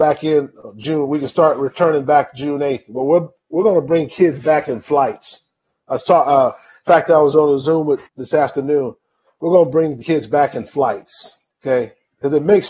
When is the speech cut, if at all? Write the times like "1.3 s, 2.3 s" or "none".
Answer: 8.1 s, 11.5 s